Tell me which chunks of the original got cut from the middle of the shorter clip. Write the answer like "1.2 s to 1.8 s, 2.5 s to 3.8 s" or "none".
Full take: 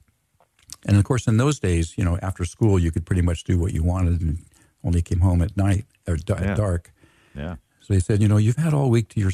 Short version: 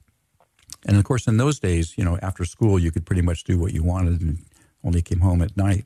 none